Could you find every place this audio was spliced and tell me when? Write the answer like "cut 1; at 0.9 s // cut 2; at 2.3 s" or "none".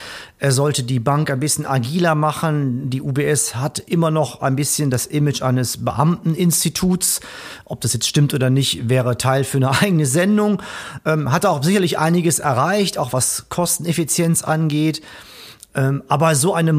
none

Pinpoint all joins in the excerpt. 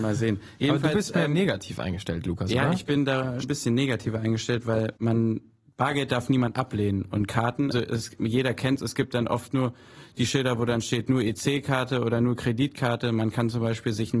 cut 1; at 3.4 s // cut 2; at 5.0 s // cut 3; at 7.7 s

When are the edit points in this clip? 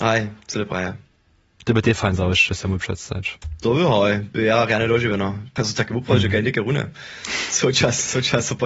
cut 1; at 5.6 s

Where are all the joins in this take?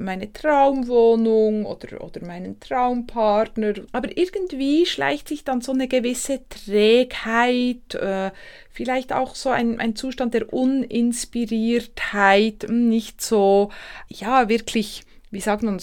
cut 1; at 3.9 s // cut 2; at 14.1 s

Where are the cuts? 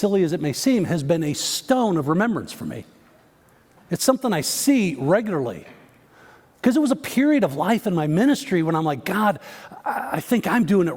cut 1; at 6.5 s

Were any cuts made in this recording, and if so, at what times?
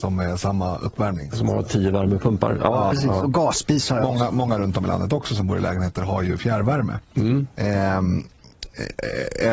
cut 1; at 2.9 s

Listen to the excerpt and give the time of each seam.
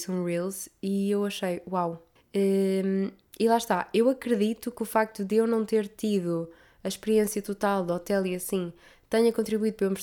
cut 1; at 2.2 s

